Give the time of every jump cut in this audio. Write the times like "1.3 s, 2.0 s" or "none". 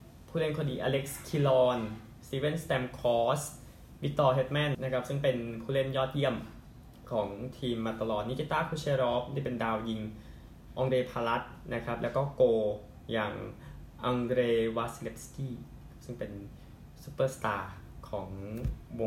4.7 s